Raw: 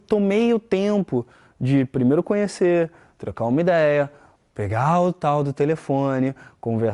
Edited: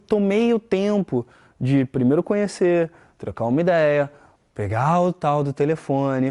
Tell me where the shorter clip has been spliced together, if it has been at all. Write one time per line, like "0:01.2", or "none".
none